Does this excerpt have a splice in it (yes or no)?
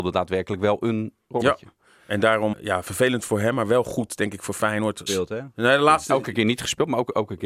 yes